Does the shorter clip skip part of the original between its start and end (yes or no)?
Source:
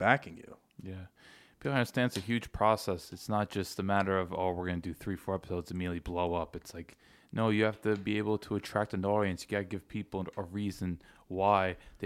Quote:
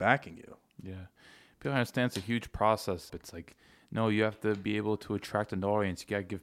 yes